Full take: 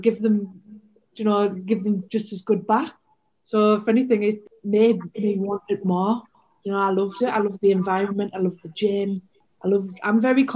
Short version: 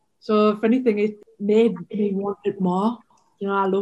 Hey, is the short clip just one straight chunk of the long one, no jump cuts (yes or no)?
yes